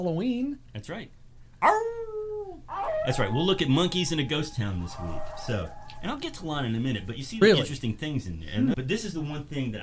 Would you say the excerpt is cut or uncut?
cut